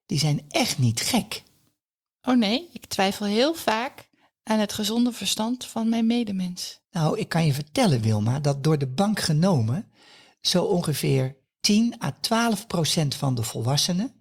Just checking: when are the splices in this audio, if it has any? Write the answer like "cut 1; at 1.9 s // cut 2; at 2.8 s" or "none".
cut 1; at 6.8 s